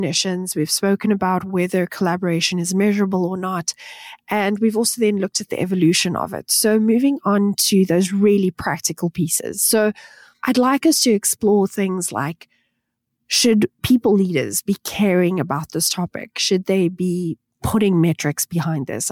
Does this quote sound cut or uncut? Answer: uncut